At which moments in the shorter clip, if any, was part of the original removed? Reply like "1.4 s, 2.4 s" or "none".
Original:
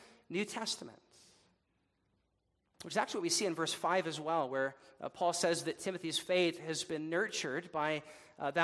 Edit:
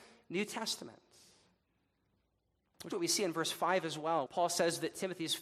2.9 s, 4.3 s